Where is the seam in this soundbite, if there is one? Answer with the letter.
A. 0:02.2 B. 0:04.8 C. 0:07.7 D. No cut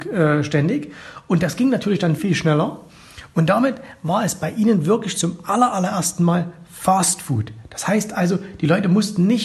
A